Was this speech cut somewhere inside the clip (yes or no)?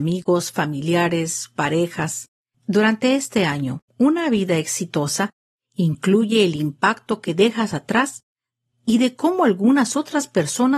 yes